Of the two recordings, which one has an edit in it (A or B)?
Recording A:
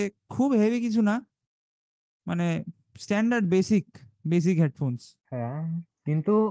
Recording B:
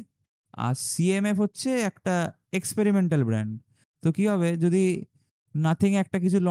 A